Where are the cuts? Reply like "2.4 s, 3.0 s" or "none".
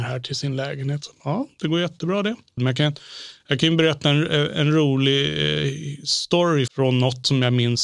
2.6 s, 6.7 s